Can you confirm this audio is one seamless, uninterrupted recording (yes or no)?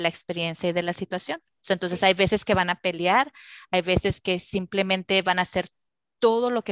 yes